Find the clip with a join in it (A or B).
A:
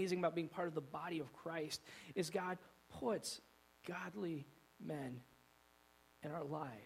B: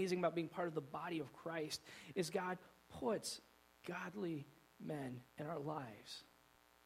B